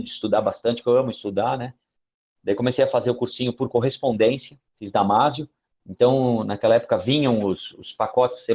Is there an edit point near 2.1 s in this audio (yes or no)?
no